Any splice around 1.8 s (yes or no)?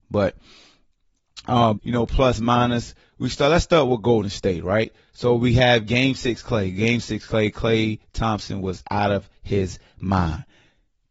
yes